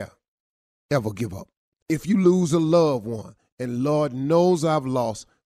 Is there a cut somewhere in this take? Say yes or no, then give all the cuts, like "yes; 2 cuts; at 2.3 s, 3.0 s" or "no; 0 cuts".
yes; 1 cut; at 1.8 s